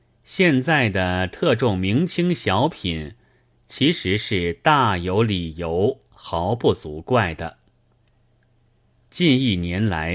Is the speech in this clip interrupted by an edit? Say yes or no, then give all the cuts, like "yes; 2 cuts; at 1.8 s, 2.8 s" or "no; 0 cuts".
yes; 1 cut; at 9.0 s